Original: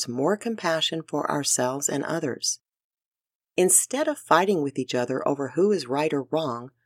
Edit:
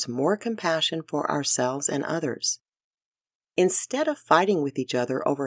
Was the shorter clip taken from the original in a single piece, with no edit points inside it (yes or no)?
yes